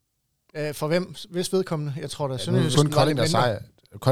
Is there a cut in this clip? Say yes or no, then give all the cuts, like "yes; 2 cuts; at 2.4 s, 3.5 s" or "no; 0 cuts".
yes; 1 cut; at 2.7 s